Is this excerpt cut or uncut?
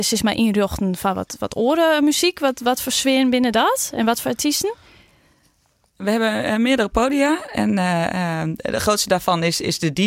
uncut